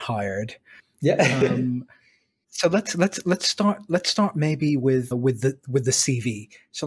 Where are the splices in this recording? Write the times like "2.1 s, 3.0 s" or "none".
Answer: 2.4 s, 5.1 s